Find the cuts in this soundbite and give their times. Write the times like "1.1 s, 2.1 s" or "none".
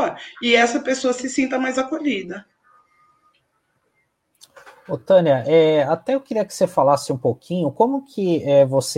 none